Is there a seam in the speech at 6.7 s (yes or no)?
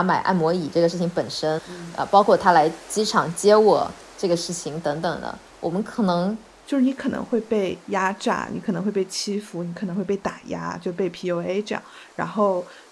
yes